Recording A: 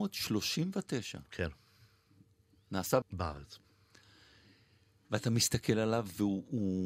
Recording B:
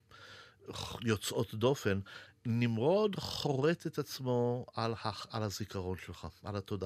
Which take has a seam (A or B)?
A